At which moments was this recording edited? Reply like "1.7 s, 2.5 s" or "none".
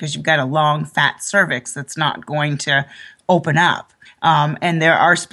4.1 s

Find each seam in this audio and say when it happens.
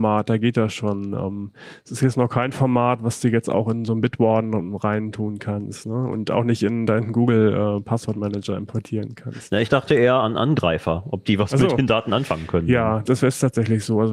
13.1 s

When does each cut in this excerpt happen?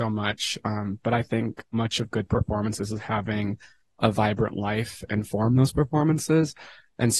1.7 s

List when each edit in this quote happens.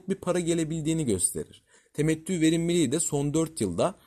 1.8 s

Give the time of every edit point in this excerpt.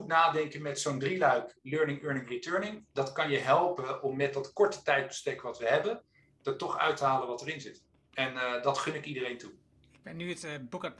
9.8 s

